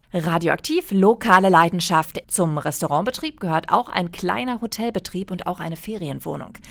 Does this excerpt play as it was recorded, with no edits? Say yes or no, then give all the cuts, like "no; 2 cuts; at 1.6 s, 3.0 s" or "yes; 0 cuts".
no; 1 cut; at 2.2 s